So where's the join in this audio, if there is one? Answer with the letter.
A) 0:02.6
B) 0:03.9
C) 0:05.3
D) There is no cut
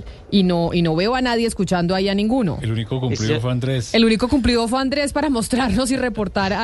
D